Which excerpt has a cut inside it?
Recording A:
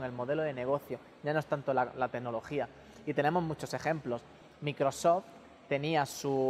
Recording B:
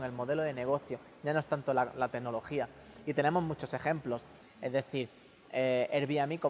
B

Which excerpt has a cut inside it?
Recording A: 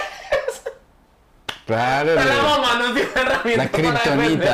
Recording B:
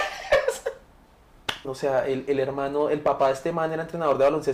B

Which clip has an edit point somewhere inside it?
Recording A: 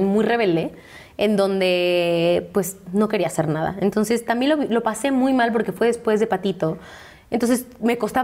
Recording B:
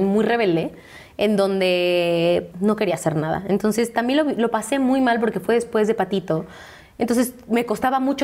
B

